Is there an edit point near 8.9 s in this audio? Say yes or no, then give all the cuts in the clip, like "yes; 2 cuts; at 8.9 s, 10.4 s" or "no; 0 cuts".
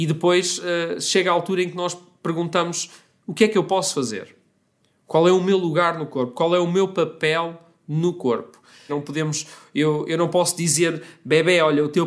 yes; 1 cut; at 8.9 s